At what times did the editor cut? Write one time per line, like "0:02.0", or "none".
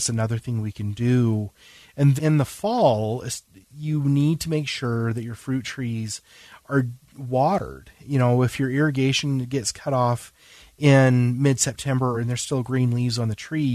0:02.2
0:12.1